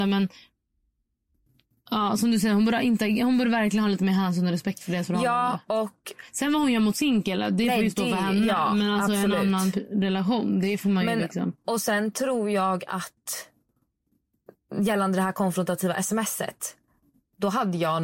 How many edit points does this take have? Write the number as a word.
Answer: zero